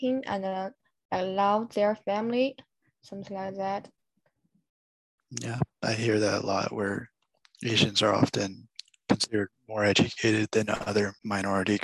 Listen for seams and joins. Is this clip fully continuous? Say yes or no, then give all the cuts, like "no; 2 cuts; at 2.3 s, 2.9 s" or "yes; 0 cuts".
yes; 0 cuts